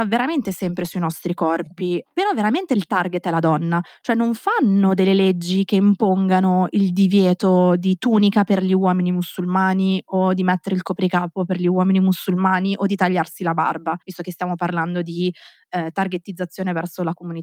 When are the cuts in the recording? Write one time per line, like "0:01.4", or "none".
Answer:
0:02.0
0:14.0